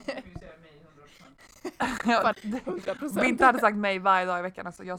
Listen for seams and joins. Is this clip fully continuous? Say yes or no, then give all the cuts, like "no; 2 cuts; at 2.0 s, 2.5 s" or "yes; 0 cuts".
no; 1 cut; at 2.3 s